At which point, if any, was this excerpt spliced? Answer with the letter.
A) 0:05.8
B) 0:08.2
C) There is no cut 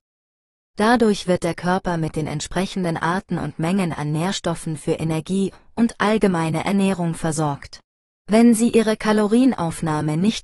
B